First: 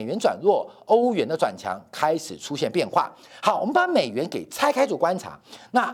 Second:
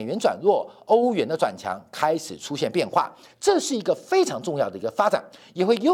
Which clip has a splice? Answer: second; 1 cut; at 3.3 s

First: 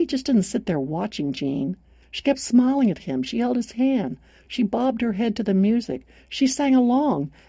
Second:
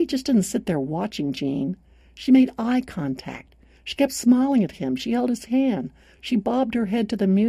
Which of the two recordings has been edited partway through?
first; 1 cut; at 2.0 s

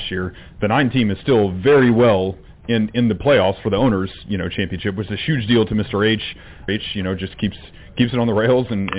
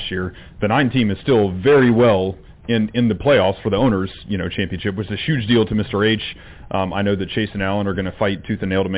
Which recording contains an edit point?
first; 1 cut; at 6.7 s

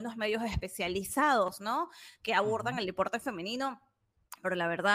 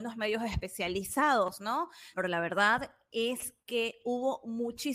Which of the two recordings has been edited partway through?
second; 1 cut; at 2.1 s

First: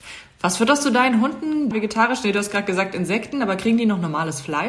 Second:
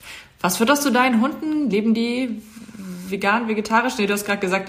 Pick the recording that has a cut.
first; 1 cut; at 1.7 s

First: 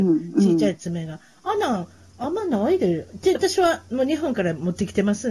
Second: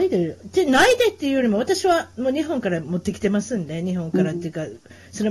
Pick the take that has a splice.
first; 1 cut; at 3.3 s

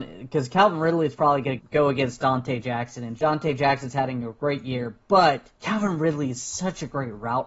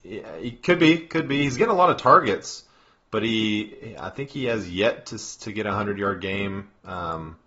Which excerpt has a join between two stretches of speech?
first; 2 cuts; at 1.6 s, 5.5 s

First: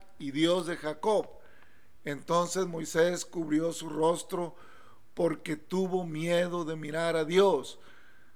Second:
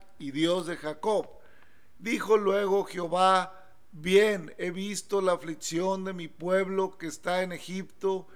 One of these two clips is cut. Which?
second; 1 cut; at 2.0 s

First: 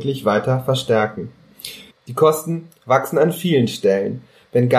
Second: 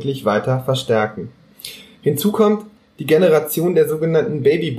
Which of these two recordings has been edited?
first; 1 cut; at 1.9 s

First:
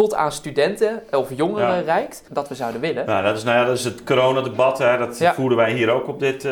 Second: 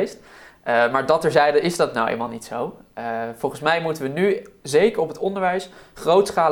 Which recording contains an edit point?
first; 1 cut; at 2.3 s

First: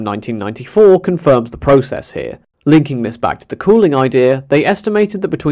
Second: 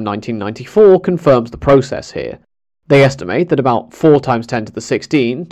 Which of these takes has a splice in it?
first; 1 cut; at 2.5 s

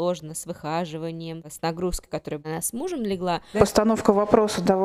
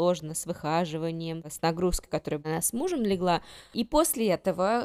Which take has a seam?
first; 1 cut; at 3.5 s

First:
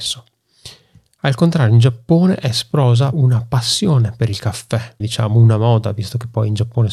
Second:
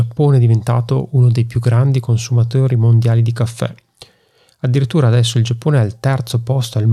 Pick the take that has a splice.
first; 2 cuts; at 3.1 s, 5.0 s

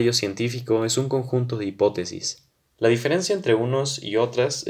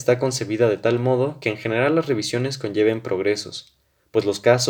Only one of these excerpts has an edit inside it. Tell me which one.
first; 1 cut; at 2.7 s

